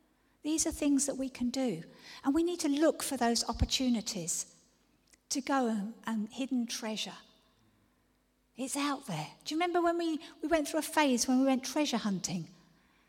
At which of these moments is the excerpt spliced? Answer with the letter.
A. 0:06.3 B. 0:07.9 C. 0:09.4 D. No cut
A